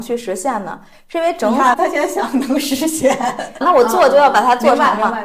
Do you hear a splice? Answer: yes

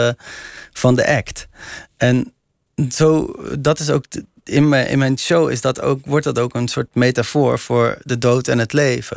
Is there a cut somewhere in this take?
no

